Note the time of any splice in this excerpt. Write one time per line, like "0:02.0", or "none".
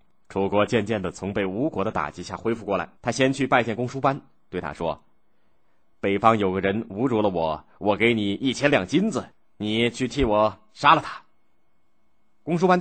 0:02.9